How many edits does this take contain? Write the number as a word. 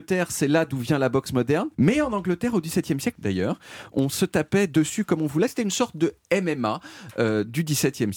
two